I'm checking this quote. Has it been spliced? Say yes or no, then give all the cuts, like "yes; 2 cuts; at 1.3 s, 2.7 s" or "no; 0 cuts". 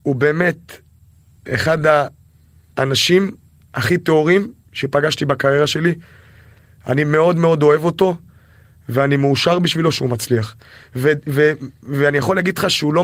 no; 0 cuts